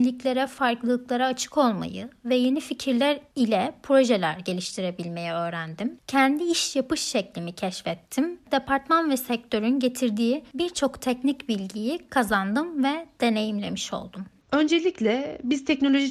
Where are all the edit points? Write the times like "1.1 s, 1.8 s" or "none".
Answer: 14.4 s